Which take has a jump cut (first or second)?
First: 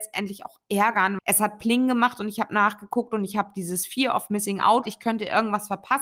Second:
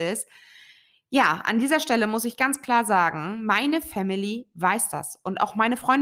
first